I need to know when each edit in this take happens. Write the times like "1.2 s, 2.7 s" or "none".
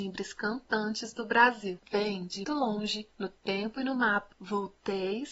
2.4 s, 4.3 s